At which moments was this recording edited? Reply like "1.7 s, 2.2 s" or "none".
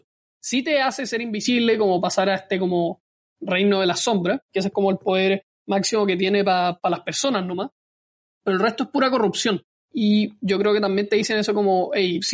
9.8 s